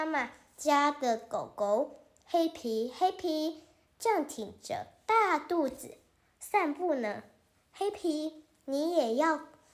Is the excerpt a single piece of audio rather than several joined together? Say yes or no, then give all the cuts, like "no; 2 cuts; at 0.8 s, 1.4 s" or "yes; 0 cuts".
yes; 0 cuts